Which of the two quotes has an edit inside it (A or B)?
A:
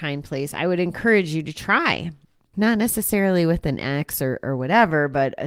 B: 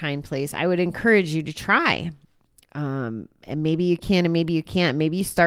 A